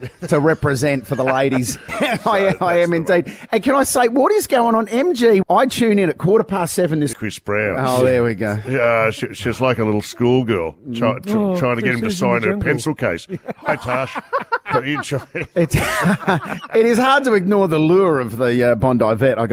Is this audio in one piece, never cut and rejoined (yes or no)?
no